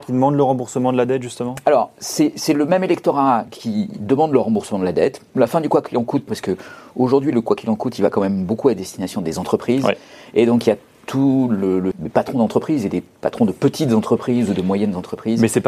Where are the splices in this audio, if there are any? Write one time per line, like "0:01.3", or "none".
0:06.3
0:11.9